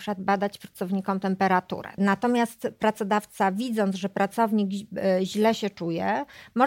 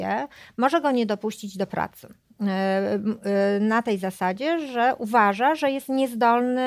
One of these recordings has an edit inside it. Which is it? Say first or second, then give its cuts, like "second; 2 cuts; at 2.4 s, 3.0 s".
first; 1 cut; at 2.0 s